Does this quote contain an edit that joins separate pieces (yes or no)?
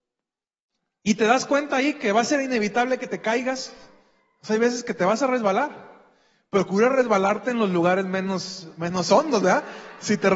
no